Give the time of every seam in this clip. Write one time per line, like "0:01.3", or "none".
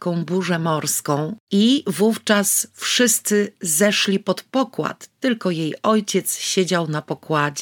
0:01.4